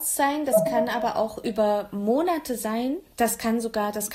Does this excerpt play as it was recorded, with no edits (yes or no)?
no